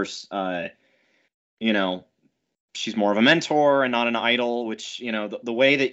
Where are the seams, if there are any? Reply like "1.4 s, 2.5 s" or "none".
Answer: none